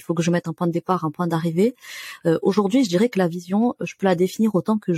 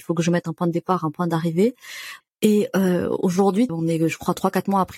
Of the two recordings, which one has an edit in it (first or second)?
second